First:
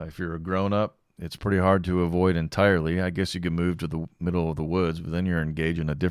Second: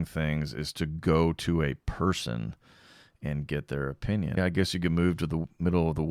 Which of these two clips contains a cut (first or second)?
second